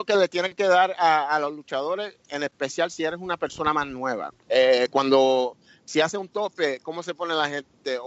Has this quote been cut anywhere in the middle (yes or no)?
yes